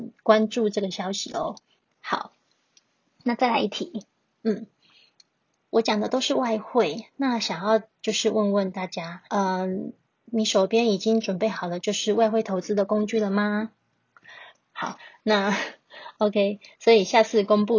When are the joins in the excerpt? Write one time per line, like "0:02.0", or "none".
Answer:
0:09.3
0:14.5

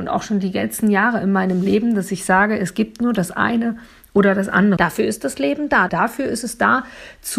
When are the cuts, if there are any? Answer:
0:04.8
0:05.9

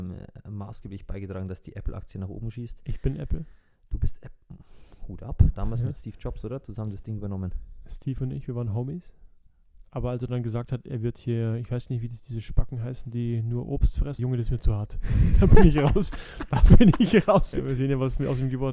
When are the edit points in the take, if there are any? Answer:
0:14.2
0:17.5

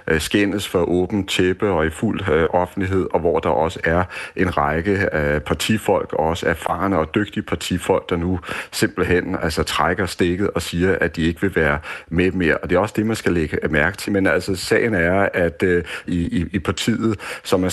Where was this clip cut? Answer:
0:14.1
0:16.1

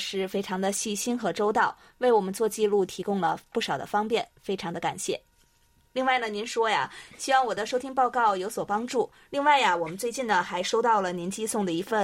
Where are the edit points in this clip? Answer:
0:09.3

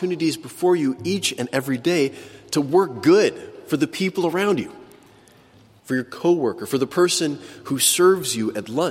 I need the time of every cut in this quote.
0:05.8

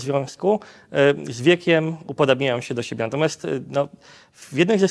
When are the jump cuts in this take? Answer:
none

